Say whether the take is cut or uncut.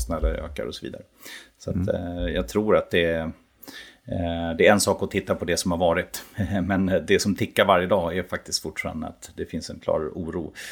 uncut